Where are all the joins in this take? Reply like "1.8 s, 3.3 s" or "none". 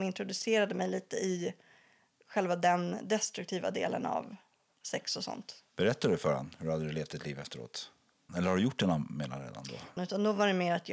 8.3 s, 10.0 s